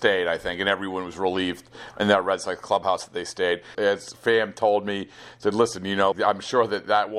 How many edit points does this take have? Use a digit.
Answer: 2